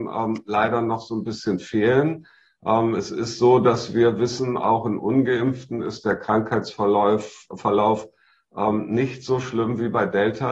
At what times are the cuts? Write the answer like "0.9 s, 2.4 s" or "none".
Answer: none